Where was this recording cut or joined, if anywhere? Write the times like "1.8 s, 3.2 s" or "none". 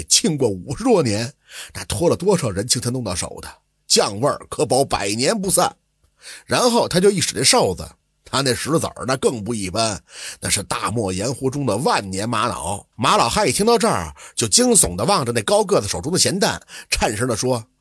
12.9 s